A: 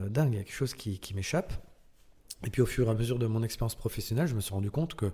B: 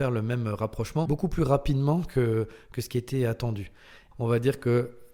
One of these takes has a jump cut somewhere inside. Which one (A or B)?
B